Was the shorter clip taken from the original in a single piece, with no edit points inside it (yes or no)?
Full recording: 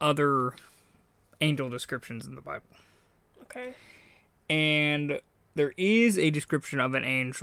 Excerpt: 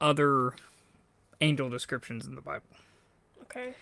yes